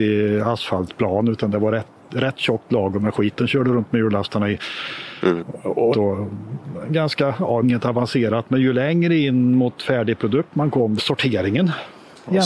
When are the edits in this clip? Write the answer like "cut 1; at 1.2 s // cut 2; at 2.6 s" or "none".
cut 1; at 5.9 s // cut 2; at 7.6 s // cut 3; at 11.0 s